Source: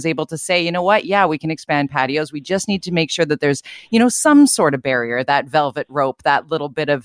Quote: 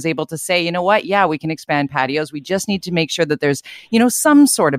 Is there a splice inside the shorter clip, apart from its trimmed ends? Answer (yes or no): no